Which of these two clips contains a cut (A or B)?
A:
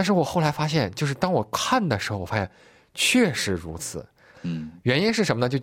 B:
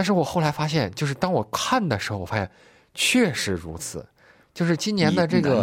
A